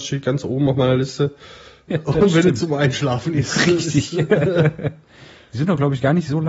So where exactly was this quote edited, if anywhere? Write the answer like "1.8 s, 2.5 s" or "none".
1.9 s